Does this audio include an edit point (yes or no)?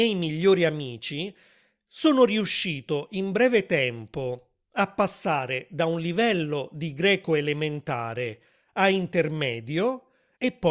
no